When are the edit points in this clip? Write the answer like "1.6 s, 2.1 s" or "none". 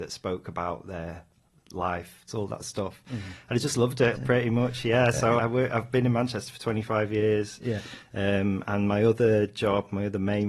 2.3 s, 4.1 s, 5.4 s